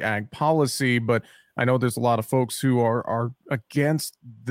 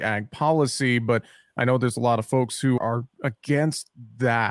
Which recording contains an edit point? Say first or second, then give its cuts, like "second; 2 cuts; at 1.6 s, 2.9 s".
second; 1 cut; at 2.8 s